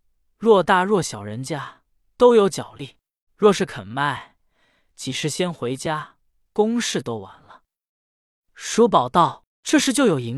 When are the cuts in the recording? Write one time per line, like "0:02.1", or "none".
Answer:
0:03.3